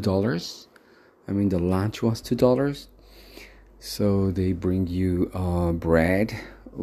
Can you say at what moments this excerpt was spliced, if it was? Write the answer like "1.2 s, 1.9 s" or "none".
none